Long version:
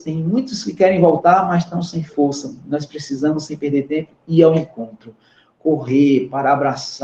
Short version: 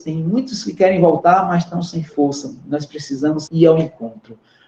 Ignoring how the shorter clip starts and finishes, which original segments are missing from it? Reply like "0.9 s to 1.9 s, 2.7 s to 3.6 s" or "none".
3.5 s to 4.2 s